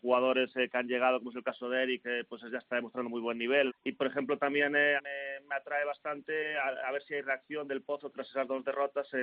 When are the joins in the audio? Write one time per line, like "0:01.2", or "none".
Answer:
0:03.7
0:05.0